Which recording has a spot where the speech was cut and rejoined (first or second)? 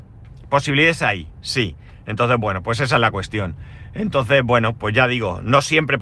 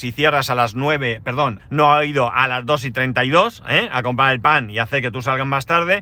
second